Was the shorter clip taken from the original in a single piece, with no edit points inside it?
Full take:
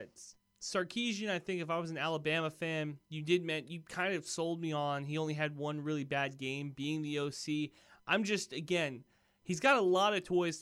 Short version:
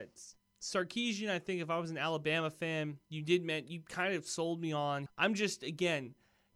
no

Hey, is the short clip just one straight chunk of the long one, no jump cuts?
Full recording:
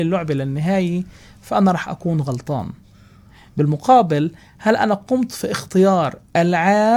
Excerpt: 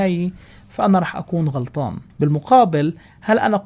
no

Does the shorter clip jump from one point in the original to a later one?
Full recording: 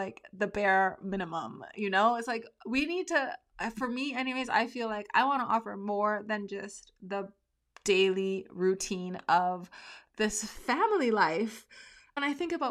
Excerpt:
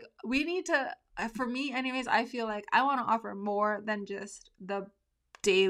no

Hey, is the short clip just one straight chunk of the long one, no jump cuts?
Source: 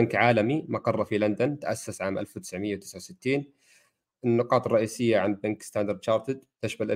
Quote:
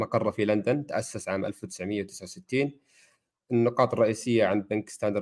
yes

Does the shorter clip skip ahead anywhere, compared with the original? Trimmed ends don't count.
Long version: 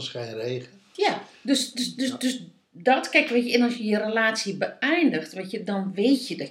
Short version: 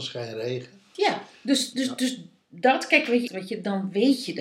yes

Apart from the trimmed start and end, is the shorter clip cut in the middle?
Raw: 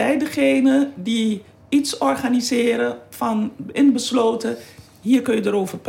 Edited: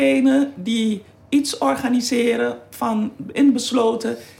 no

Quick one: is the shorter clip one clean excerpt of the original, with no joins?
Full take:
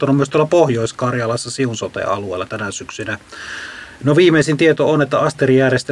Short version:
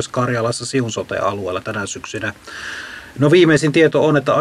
yes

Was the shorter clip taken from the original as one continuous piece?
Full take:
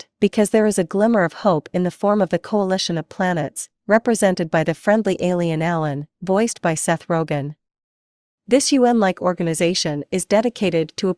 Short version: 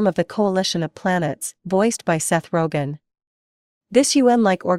no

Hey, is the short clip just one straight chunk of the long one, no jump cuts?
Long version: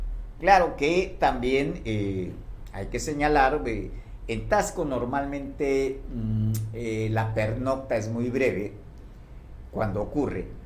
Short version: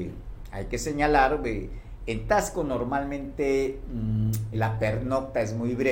no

